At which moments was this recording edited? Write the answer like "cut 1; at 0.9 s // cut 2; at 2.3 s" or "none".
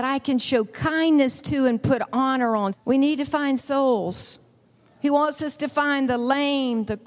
cut 1; at 2.7 s